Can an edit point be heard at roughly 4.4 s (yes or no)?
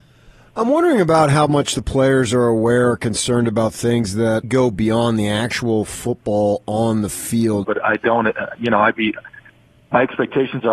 yes